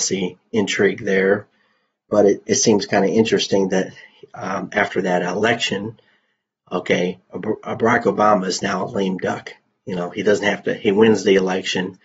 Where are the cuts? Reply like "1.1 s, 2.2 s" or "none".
none

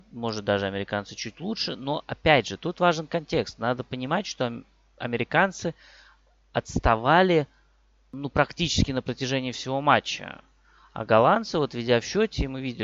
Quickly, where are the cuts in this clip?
none

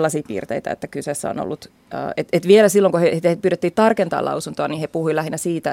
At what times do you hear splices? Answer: none

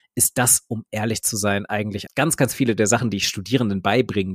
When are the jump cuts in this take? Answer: 2.1 s

